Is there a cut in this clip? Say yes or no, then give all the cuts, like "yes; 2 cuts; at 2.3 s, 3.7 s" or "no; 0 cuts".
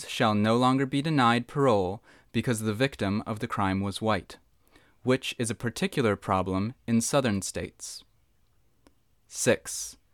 no; 0 cuts